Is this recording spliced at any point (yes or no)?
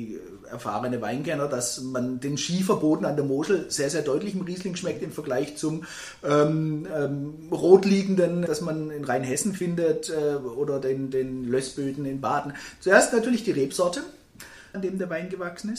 yes